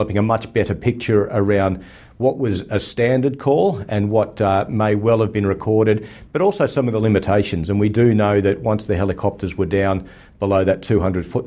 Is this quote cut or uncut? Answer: uncut